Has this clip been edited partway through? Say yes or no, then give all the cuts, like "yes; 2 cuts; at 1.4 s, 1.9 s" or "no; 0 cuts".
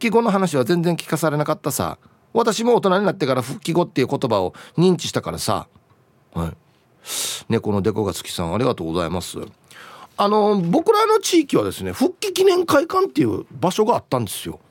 no; 0 cuts